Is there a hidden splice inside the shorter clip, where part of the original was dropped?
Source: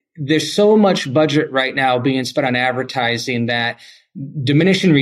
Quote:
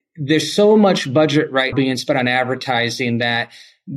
yes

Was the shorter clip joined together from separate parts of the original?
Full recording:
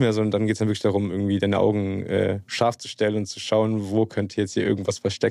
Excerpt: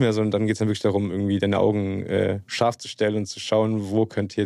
no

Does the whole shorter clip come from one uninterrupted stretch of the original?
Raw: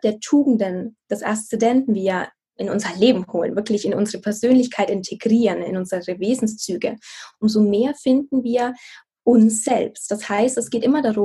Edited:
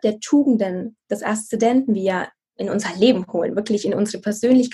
yes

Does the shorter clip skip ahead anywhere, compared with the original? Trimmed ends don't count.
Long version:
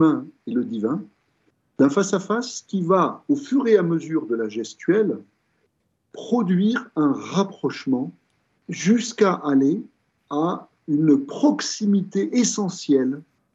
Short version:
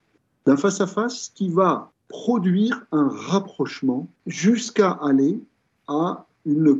yes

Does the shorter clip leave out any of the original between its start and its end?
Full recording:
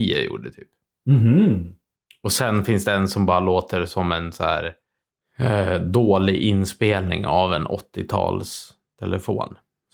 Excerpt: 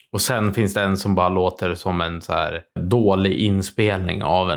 yes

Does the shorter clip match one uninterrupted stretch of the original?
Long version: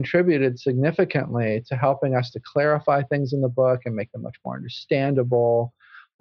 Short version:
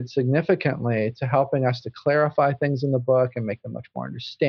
yes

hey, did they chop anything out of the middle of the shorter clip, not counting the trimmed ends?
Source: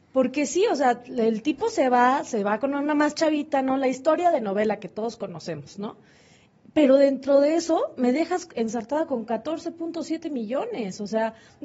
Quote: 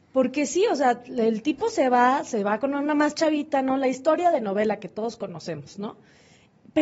no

